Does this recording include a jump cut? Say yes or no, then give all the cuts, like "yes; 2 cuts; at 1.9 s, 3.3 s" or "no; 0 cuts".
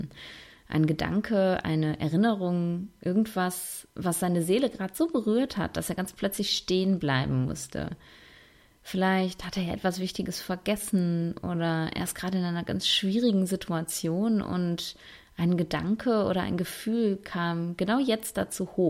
no; 0 cuts